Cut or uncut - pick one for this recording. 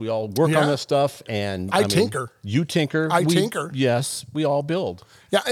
uncut